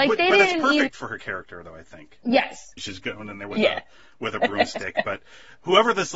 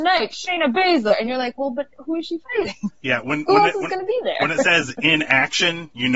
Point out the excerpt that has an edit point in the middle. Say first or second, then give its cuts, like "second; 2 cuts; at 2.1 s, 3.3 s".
first; 1 cut; at 2.8 s